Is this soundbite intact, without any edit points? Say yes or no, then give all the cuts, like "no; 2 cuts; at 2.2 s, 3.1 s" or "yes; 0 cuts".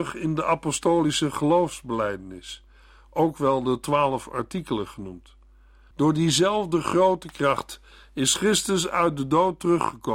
no; 1 cut; at 5.9 s